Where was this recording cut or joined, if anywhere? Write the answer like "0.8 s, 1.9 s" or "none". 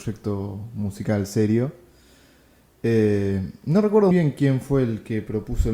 4.1 s